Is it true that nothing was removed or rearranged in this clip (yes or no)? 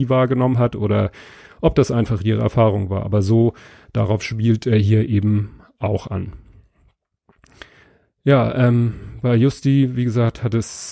yes